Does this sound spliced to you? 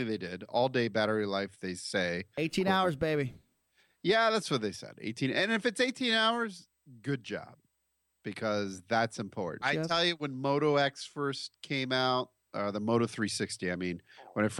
yes; 1 cut; at 9.6 s

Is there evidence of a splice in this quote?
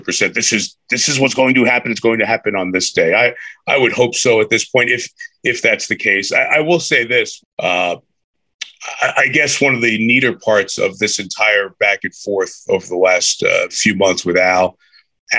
yes; 1 cut; at 7.4 s

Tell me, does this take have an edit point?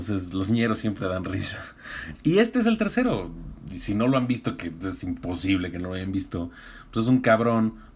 yes; 1 cut; at 2.2 s

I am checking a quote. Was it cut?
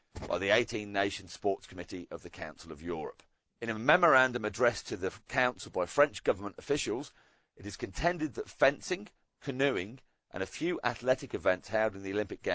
yes; 1 cut; at 3.5 s

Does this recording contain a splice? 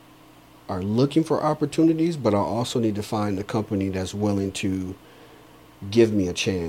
no; 0 cuts

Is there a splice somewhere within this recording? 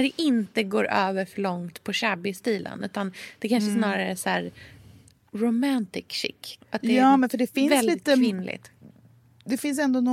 yes; 1 cut; at 6.6 s

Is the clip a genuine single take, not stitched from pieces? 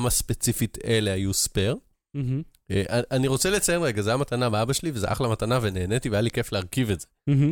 yes; 0 cuts

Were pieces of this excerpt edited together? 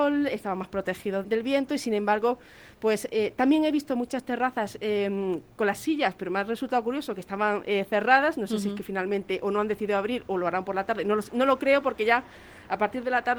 yes; 1 cut; at 1.2 s

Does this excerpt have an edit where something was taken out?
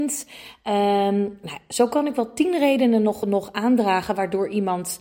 no; 0 cuts

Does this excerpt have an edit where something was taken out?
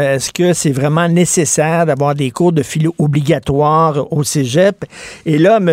no; 0 cuts

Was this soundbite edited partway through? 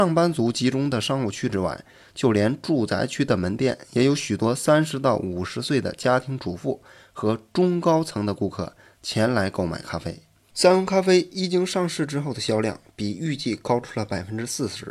yes; 1 cut; at 10.5 s

